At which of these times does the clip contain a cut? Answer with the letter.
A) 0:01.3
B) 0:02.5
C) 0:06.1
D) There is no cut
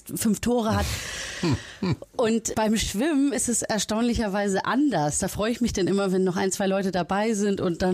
B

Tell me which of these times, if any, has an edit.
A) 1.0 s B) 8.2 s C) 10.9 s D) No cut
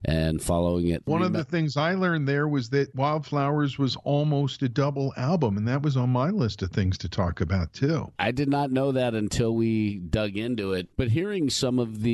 D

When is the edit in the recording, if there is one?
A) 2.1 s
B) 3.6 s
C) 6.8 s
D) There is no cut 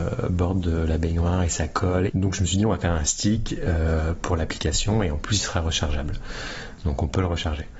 A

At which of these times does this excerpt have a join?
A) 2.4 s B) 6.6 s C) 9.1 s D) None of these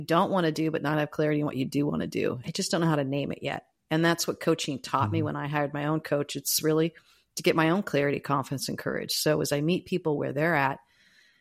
A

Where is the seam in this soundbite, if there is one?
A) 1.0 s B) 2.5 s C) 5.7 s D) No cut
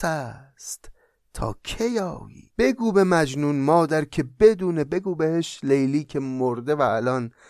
B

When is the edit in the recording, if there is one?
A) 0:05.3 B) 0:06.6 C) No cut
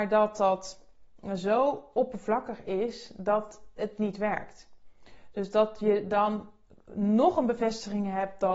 C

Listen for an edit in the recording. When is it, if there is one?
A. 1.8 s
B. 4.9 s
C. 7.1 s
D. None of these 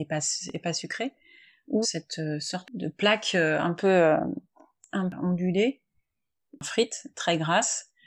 A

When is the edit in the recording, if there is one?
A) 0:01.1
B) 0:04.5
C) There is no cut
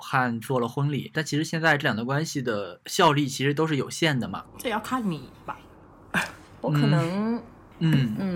B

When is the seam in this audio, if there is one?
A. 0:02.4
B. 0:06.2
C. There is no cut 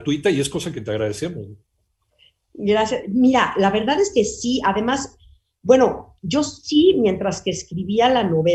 C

